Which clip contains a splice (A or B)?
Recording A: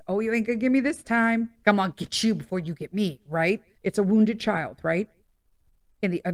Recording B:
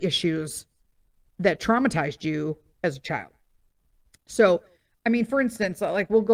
A